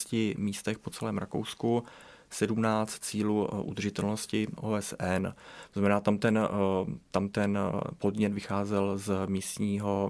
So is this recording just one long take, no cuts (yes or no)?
yes